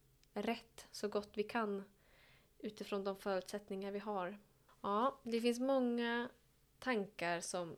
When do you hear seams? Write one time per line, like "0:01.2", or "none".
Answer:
none